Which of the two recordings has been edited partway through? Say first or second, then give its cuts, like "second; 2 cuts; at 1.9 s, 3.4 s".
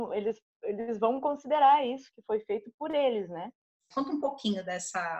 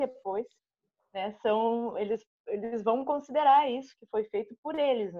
first; 1 cut; at 3.9 s